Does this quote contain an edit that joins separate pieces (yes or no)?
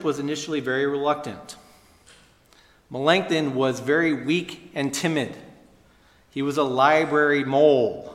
no